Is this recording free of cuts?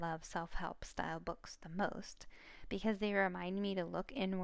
yes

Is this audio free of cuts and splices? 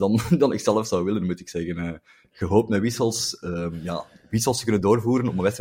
yes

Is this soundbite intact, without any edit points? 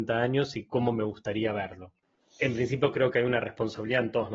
yes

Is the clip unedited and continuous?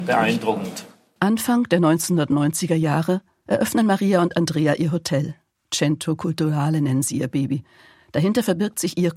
yes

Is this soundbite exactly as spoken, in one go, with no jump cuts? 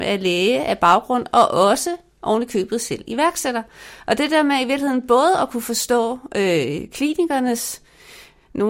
yes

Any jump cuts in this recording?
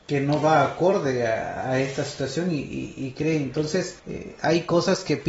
yes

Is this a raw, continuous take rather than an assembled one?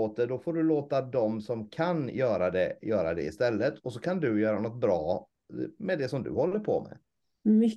yes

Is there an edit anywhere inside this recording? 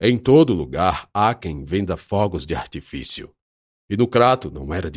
no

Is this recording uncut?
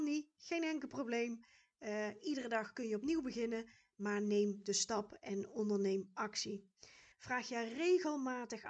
no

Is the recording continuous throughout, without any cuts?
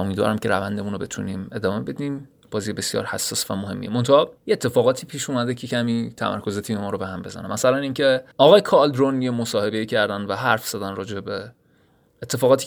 no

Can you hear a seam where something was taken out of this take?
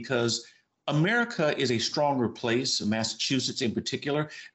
no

